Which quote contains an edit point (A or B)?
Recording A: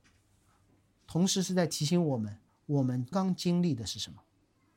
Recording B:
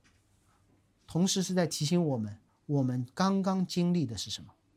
A